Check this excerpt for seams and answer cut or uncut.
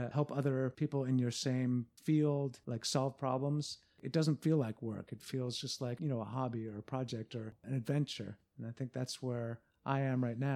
uncut